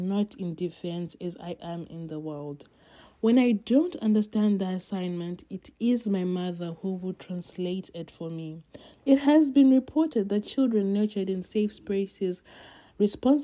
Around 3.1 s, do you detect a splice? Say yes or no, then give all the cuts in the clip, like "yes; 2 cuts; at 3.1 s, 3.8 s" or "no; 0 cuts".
no; 2 cuts; at 1.6 s, 8.9 s